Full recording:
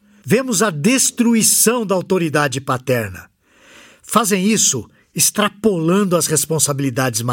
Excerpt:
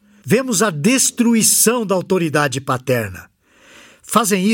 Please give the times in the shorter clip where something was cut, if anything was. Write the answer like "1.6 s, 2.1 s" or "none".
none